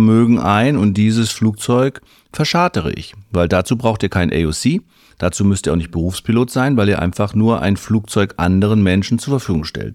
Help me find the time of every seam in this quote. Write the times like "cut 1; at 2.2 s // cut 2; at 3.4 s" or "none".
none